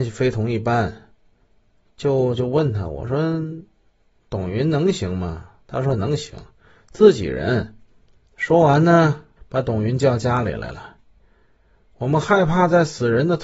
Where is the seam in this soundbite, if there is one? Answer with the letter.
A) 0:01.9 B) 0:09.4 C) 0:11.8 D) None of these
B